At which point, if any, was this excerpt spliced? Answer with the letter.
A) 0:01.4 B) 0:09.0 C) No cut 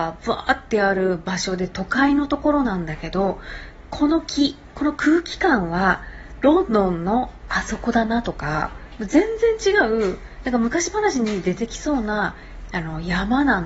C